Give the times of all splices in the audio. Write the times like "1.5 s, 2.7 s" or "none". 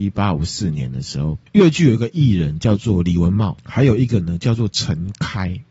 none